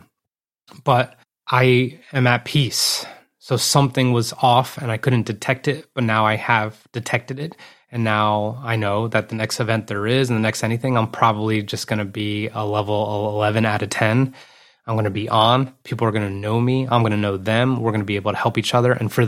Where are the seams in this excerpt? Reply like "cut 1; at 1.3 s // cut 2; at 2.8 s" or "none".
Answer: none